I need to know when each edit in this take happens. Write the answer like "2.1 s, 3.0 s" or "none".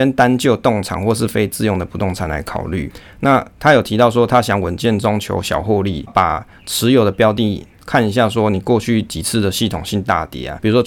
6.1 s